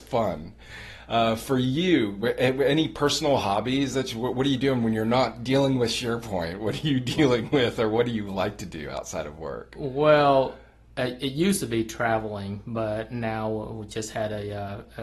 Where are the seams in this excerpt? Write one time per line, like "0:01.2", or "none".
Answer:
none